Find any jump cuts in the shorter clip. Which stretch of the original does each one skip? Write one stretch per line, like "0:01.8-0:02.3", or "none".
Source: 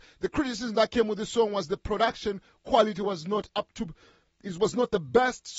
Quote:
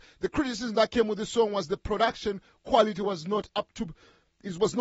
none